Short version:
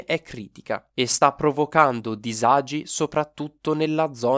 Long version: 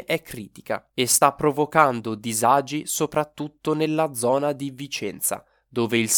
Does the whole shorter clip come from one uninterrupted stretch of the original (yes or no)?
yes